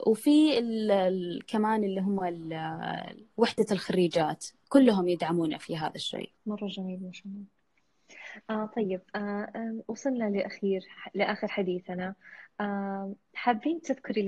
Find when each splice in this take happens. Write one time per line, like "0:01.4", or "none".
0:03.3
0:06.4